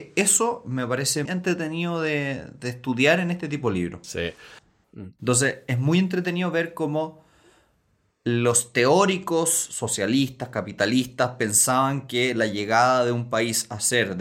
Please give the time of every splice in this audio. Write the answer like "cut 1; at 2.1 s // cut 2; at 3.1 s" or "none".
cut 1; at 1.2 s // cut 2; at 4.8 s